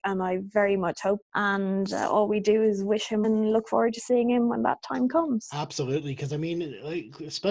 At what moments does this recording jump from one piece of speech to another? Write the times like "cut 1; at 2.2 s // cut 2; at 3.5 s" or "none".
cut 1; at 1.2 s // cut 2; at 3.2 s